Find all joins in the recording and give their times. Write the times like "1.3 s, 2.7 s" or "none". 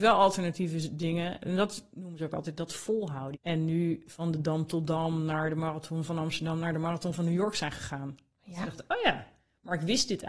3.3 s